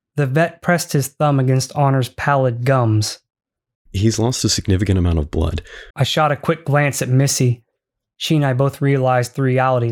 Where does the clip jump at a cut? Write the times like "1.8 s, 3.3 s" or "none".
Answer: 3.7 s, 5.9 s